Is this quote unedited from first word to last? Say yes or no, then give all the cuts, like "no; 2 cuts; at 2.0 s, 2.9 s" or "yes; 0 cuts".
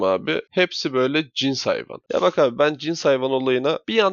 yes; 0 cuts